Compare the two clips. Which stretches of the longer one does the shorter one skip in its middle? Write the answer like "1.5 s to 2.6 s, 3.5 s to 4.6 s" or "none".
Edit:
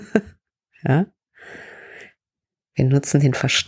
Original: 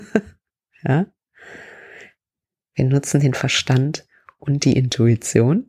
none